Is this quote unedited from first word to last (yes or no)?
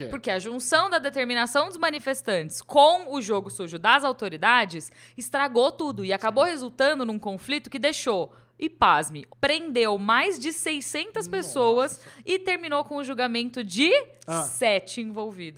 no